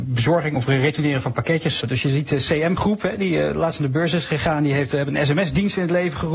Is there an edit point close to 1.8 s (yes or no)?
yes